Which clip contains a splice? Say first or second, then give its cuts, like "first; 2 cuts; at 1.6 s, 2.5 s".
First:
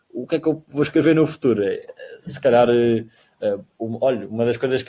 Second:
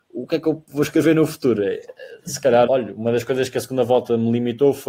second; 1 cut; at 2.7 s